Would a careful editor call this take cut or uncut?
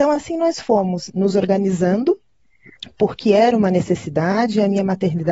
cut